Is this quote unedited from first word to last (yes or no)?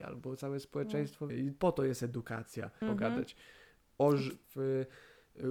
no